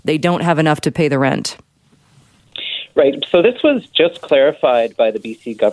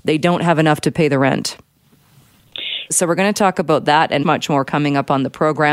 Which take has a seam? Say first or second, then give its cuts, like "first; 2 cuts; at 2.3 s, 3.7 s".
second; 2 cuts; at 2.9 s, 4.2 s